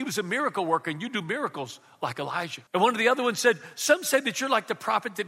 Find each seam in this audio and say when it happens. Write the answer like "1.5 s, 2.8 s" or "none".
2.7 s